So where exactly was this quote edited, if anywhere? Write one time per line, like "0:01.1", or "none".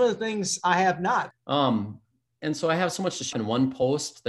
0:01.3
0:03.3